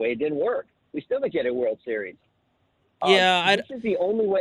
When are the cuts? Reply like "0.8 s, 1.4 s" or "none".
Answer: none

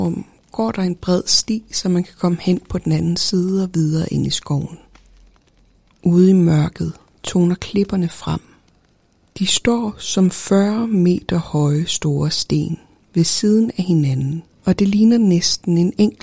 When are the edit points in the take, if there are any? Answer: 5.9 s, 14.6 s

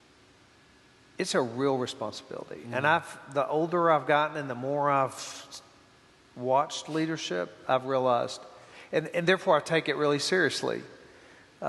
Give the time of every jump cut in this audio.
none

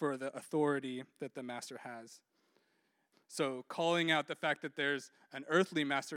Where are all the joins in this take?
3.1 s

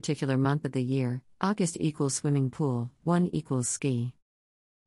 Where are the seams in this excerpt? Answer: 1.3 s

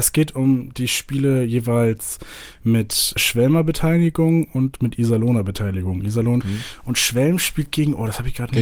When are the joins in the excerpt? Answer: 3.2 s, 6.4 s

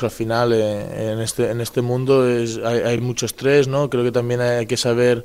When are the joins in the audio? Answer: none

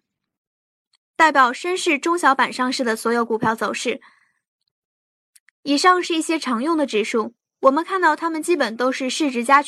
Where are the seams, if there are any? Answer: none

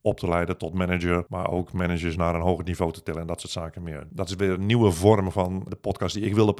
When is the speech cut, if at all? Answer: none

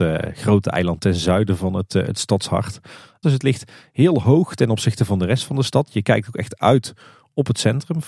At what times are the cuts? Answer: 3.2 s

